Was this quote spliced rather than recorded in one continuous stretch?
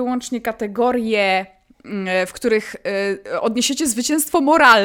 no; 0 cuts

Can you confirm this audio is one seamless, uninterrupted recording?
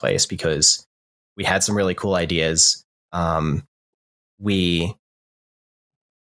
yes; 0 cuts

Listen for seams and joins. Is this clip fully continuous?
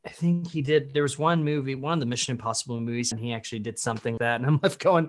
no; 2 cuts; at 3.1 s, 4.2 s

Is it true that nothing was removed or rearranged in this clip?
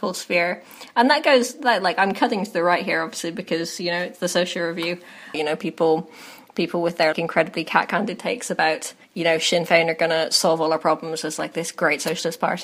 no; 3 cuts; at 5.3 s, 7.1 s, 9.0 s

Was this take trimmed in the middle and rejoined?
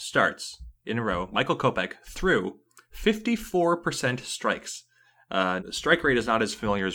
yes; 1 cut; at 5.6 s

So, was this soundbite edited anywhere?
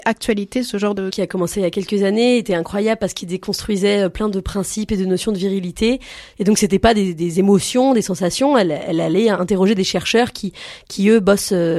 yes; 2 cuts; at 1.1 s, 6.3 s

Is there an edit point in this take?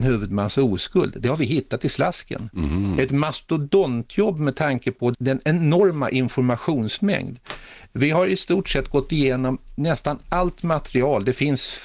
yes; 1 cut; at 5.1 s

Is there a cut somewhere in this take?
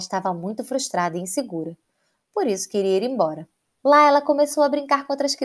yes; 1 cut; at 3.8 s

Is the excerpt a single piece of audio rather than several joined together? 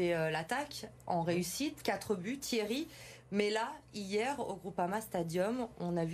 yes; 0 cuts

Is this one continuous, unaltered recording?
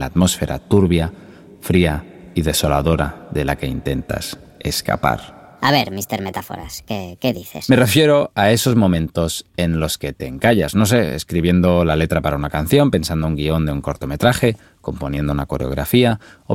yes; 0 cuts

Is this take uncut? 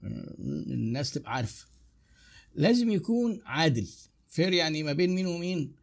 no; 1 cut; at 4.2 s

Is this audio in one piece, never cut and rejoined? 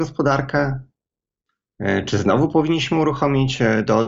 yes; 0 cuts

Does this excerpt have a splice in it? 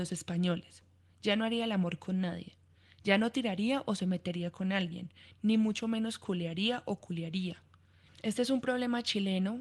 no; 0 cuts

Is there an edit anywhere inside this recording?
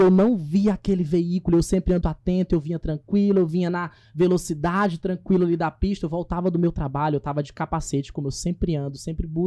yes; 1 cut; at 2.0 s

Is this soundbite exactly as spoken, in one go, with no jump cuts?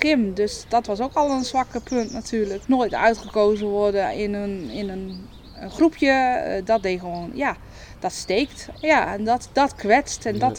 no; 2 cuts; at 2.6 s, 8.7 s

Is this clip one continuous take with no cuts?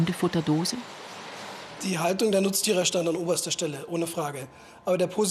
no; 1 cut; at 1.8 s

